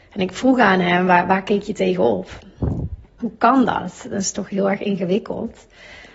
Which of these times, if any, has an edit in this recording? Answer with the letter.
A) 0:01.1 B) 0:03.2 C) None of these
B